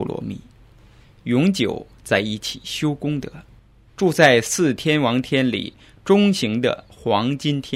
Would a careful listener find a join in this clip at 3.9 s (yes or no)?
yes